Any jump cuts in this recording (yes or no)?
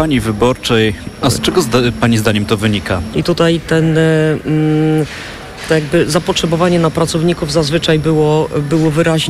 yes